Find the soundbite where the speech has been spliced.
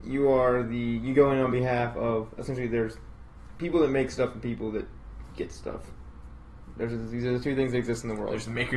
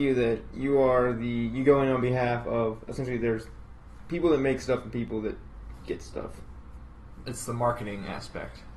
second; 1 cut; at 7.2 s

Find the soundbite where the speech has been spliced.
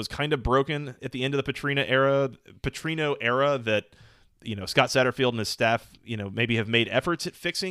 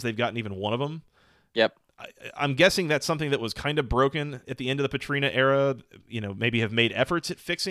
second; 1 cut; at 6.0 s

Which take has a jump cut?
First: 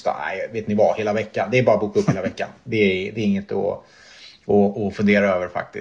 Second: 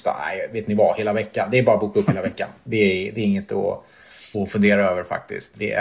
second; 1 cut; at 4.3 s

